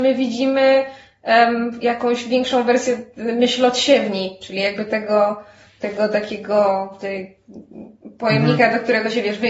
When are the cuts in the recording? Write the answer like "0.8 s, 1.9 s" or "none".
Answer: none